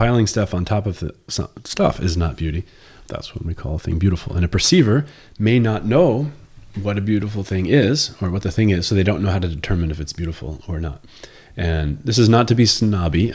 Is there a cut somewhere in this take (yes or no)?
yes